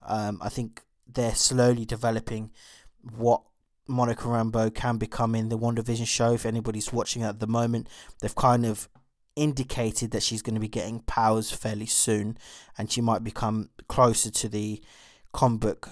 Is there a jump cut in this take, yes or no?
no